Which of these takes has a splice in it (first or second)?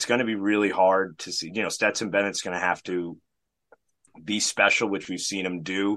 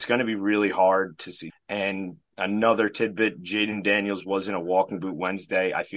second